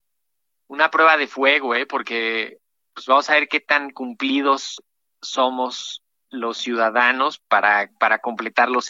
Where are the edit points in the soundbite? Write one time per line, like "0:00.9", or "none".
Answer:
none